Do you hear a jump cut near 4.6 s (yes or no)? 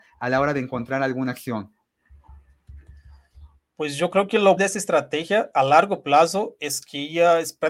yes